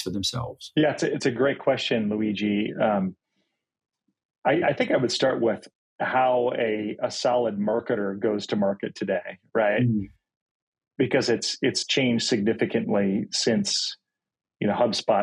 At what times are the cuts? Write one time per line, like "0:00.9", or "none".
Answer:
none